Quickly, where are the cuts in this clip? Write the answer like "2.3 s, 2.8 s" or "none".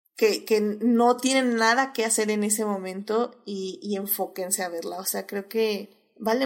none